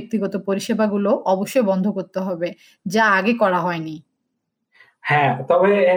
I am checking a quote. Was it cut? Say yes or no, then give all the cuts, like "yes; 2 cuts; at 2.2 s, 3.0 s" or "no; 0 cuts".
no; 0 cuts